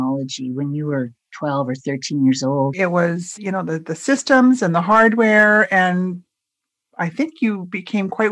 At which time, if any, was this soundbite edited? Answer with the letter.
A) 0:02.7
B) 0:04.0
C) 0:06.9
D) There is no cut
A